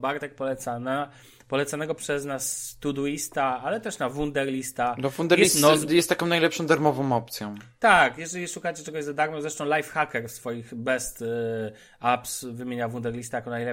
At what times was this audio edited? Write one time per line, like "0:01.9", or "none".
none